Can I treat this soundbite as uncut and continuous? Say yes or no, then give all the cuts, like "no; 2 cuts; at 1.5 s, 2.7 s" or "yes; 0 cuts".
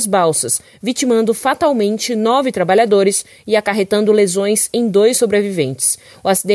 yes; 0 cuts